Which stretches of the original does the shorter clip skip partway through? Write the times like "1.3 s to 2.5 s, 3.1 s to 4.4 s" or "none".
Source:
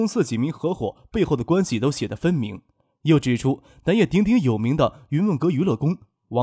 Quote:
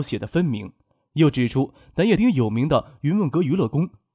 4.1 s to 4.3 s